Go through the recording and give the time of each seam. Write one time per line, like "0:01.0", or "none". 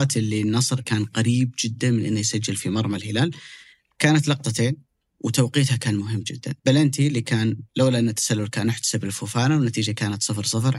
0:06.6
0:07.7